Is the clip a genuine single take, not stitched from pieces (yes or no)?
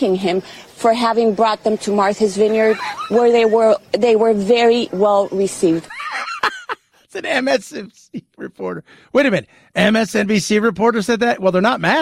yes